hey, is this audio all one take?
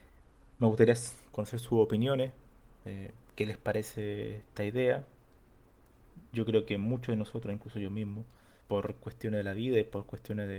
no; 1 cut; at 8.6 s

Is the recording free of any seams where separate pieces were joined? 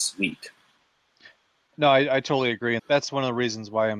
no; 1 cut; at 2.8 s

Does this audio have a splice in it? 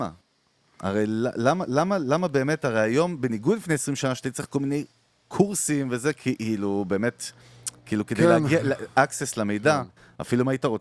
no; 0 cuts

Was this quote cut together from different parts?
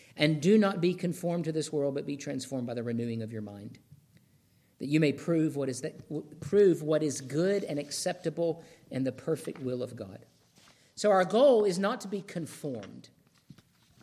no; 0 cuts

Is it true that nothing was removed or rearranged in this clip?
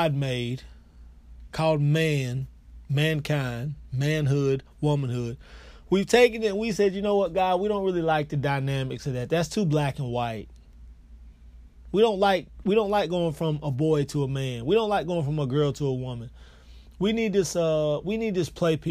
yes; 0 cuts

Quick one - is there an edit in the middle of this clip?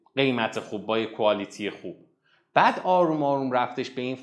no; 0 cuts

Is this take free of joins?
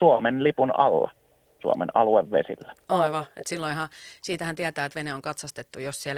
yes; 0 cuts

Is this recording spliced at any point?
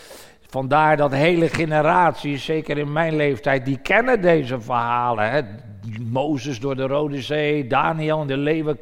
no; 0 cuts

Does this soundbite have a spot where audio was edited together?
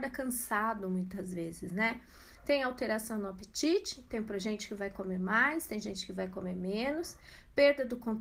no; 0 cuts

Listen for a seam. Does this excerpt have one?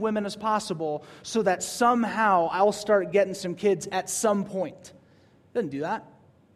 no; 0 cuts

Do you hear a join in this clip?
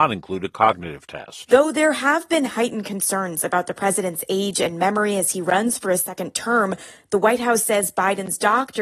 no; 0 cuts

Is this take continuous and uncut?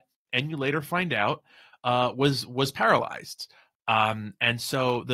yes; 0 cuts

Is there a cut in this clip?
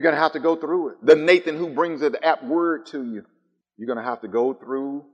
yes; 1 cut; at 3.6 s

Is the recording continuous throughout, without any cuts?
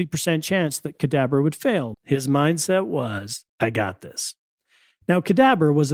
no; 2 cuts; at 1.9 s, 3.5 s

